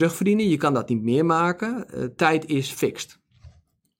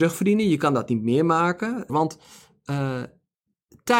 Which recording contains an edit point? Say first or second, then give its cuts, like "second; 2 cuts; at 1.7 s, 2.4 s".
second; 1 cut; at 1.9 s